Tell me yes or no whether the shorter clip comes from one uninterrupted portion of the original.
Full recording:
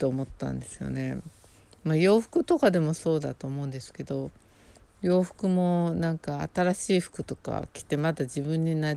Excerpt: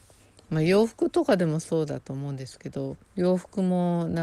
no